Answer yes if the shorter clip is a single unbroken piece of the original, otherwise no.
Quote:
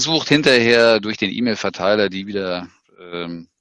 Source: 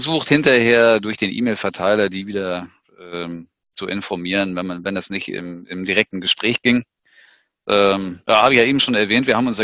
yes